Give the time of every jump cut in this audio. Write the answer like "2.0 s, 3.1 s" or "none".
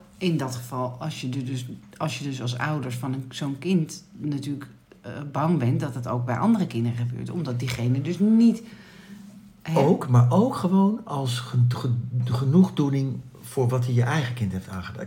none